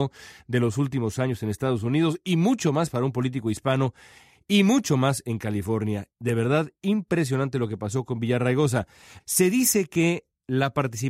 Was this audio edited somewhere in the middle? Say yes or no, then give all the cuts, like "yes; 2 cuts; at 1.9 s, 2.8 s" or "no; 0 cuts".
yes; 1 cut; at 9.2 s